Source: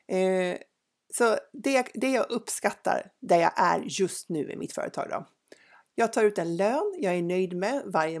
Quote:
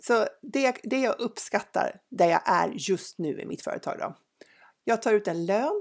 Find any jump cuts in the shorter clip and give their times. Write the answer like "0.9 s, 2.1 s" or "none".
none